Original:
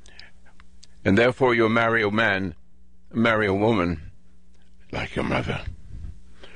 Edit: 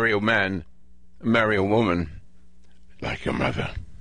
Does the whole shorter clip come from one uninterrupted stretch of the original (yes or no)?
yes